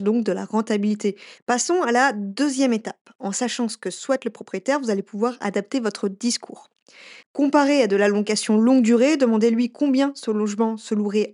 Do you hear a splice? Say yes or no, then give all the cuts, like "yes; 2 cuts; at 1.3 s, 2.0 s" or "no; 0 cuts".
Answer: yes; 2 cuts; at 1.4 s, 7.2 s